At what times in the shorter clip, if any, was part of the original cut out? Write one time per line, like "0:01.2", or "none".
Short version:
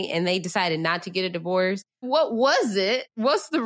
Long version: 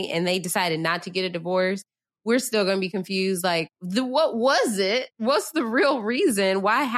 0:02.0